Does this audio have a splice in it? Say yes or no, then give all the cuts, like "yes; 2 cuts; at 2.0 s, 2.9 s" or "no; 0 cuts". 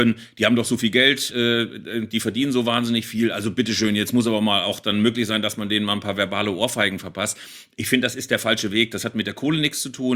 no; 0 cuts